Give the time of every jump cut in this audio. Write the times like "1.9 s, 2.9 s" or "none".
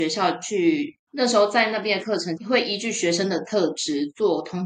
1.1 s, 2.4 s